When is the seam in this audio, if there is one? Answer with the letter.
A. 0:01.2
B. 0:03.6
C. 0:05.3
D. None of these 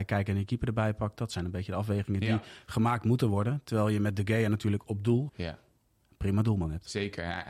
C